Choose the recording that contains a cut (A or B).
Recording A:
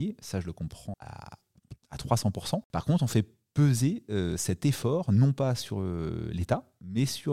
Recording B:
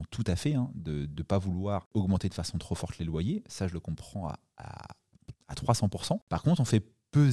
A